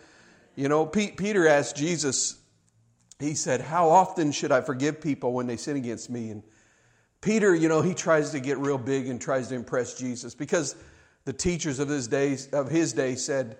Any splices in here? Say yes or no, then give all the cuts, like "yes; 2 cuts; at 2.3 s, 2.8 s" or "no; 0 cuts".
no; 0 cuts